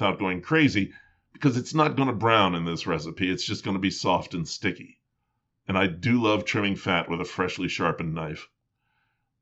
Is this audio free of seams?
yes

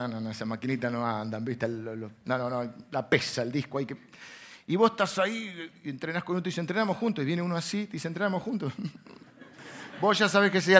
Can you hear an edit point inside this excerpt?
no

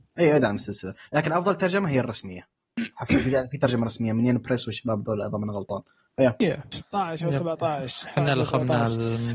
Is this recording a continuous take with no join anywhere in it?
no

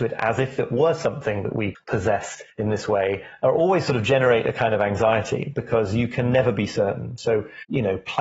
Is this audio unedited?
yes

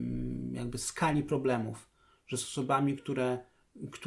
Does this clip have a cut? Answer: no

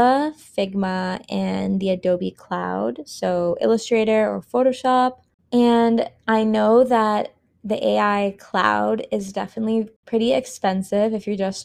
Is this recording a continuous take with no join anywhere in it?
yes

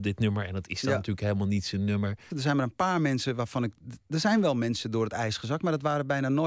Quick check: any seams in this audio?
yes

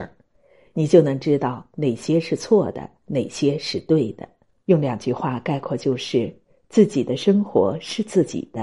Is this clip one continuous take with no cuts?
no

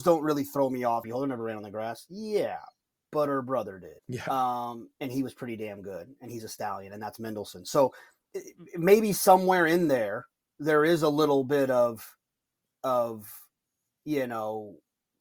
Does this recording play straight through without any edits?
no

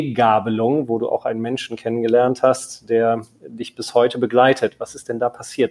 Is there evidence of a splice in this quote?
no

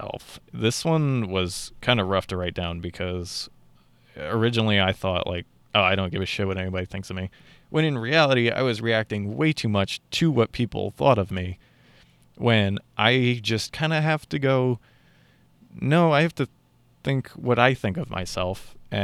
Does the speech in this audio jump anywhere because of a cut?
no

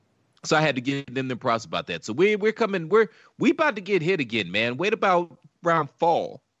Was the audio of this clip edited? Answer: no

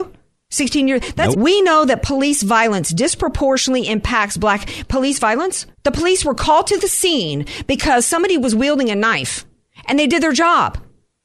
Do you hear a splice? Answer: yes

